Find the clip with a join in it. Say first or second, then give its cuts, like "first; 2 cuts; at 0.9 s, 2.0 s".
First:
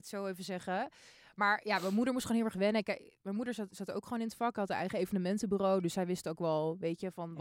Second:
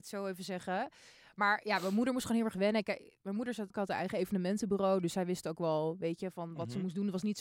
second; 1 cut; at 3.7 s